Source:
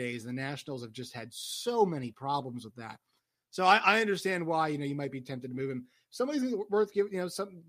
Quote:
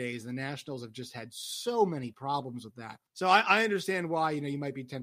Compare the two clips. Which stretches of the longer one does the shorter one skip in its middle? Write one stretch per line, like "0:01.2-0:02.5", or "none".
0:03.1-0:03.4